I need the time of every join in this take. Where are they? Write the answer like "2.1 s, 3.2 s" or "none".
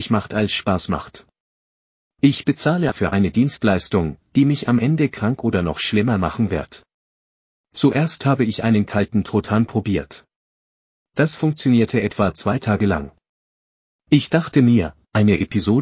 2.9 s